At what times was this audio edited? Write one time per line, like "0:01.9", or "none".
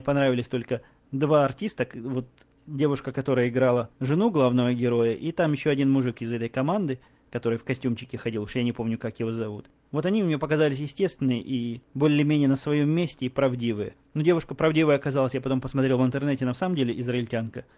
none